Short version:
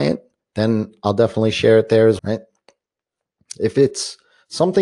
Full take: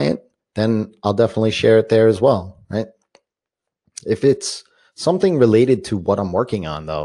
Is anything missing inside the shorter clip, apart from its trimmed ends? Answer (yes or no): yes